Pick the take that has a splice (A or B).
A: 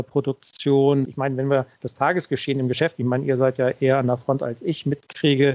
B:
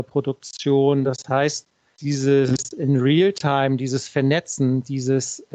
A